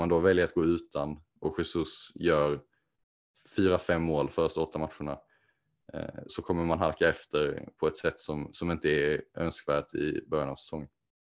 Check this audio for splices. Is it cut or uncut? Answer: cut